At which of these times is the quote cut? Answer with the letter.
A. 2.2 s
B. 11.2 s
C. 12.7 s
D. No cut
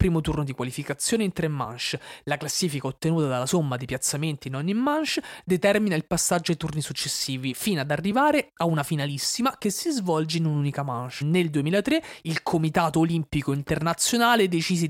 B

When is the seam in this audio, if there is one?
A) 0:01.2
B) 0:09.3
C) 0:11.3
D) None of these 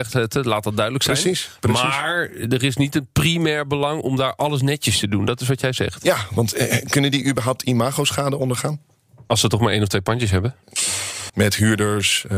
C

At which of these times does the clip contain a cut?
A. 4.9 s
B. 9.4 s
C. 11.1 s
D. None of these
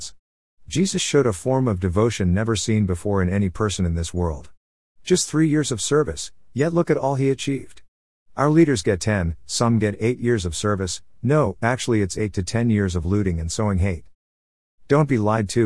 D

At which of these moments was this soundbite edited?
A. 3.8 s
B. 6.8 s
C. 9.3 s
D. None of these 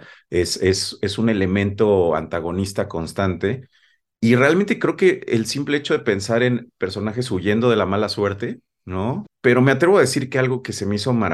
C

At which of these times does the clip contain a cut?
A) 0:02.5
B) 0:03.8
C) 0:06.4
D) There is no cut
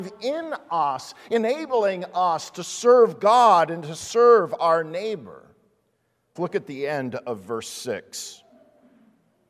C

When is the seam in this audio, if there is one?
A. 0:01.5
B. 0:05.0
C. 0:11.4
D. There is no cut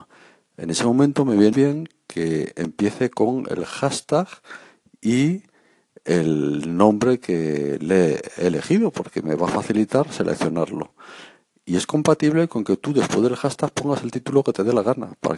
A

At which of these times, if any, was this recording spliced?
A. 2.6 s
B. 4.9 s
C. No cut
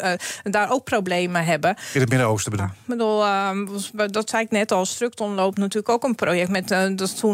A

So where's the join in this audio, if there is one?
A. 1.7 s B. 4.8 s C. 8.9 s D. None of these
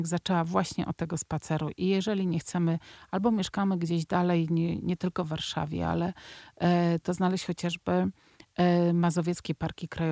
B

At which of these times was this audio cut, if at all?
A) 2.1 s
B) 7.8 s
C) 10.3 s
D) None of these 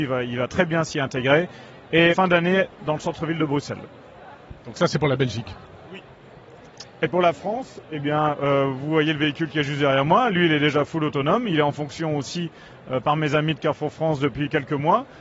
A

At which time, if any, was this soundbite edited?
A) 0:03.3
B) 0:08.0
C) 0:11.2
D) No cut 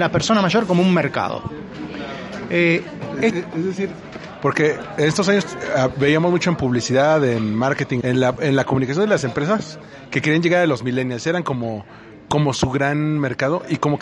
B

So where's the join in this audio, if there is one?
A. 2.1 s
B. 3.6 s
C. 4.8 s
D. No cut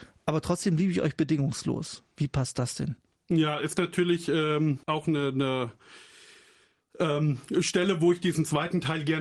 C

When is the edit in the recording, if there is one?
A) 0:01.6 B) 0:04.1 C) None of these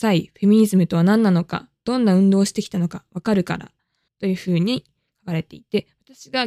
B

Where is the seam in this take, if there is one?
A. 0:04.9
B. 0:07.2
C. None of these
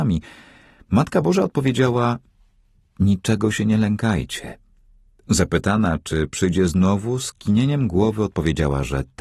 C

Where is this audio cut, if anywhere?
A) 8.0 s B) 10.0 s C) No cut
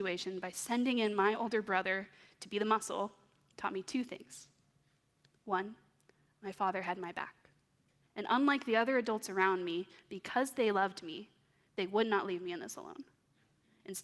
A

